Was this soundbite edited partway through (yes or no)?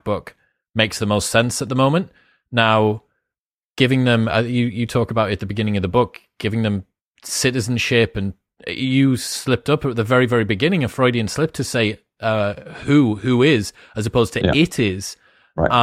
no